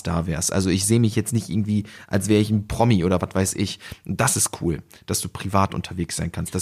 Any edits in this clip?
no; 0 cuts

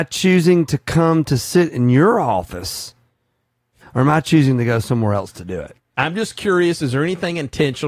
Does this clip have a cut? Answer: yes; 2 cuts; at 3.8 s, 5.8 s

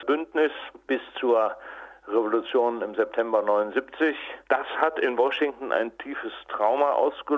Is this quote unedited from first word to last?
no; 1 cut; at 4.4 s

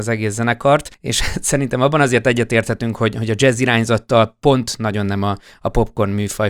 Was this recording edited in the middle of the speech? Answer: no; 0 cuts

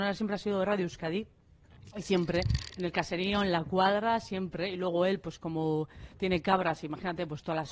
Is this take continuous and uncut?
yes; 0 cuts

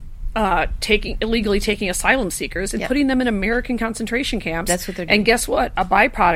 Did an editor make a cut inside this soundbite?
no; 0 cuts

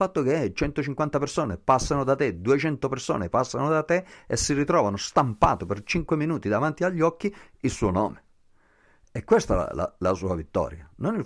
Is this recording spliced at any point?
no; 0 cuts

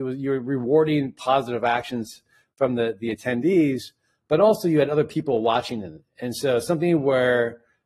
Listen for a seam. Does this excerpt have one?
no; 0 cuts

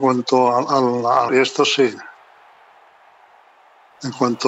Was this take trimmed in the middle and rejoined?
yes; 1 cut; at 1.3 s

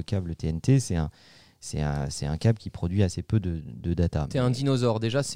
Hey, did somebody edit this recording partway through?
no; 0 cuts

